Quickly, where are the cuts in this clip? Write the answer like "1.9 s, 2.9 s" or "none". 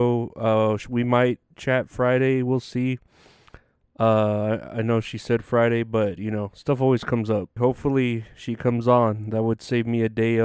7.6 s